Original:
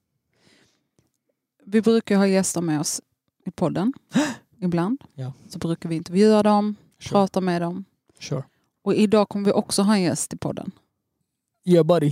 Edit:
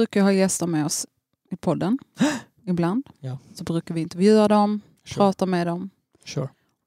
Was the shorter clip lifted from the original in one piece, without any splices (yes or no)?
yes